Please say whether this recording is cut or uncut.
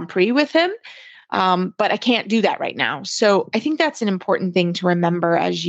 uncut